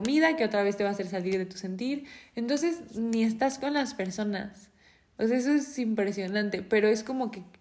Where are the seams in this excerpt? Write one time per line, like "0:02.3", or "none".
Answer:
none